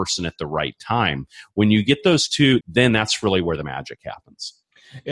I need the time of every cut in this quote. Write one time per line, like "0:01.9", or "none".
0:02.6